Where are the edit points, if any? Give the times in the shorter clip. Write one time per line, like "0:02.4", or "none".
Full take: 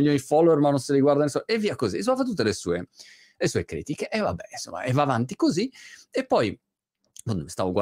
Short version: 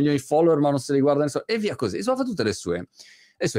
none